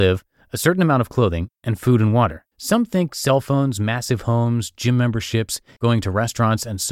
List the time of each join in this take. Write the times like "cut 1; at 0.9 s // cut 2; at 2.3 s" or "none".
cut 1; at 2.5 s // cut 2; at 5.8 s